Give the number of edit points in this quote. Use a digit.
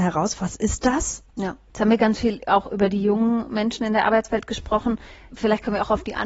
1